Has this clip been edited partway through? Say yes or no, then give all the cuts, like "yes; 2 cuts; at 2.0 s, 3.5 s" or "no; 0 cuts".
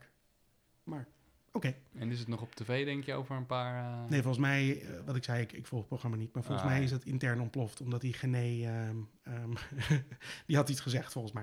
no; 0 cuts